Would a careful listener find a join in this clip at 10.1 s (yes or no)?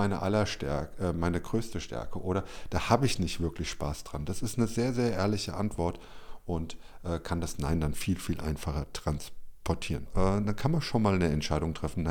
yes